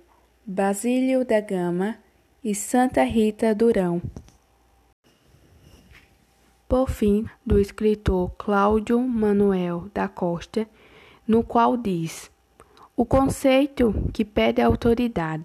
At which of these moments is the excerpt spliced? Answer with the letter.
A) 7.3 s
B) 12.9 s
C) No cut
A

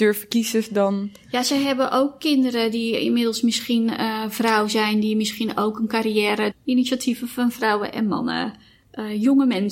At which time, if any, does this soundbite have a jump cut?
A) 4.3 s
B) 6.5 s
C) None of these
B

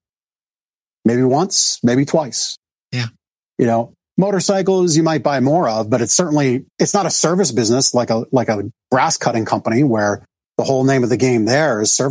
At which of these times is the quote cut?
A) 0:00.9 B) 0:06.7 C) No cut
B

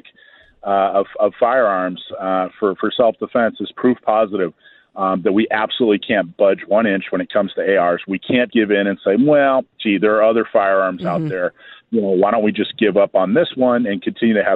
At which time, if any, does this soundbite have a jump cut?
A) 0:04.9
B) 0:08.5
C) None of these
B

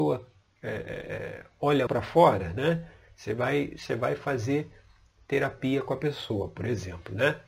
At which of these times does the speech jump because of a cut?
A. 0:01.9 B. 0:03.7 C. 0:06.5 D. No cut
A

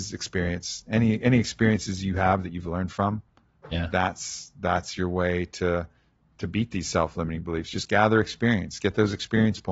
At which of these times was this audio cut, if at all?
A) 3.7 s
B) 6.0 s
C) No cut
A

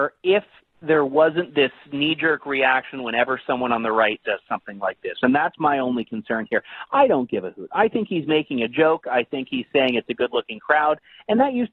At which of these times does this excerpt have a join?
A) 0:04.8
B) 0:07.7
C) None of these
C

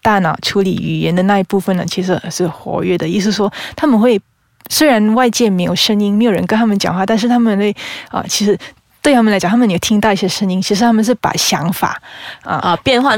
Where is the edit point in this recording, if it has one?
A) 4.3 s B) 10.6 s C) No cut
C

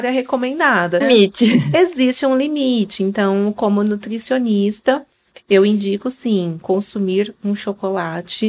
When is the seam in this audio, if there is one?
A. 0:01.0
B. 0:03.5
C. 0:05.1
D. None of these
A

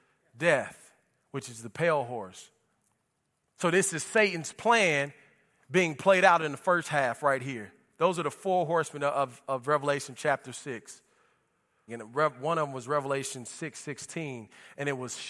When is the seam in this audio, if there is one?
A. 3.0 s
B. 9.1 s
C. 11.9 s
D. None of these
C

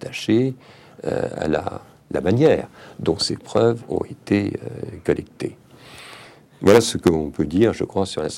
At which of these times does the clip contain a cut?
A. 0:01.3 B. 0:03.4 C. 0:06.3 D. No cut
D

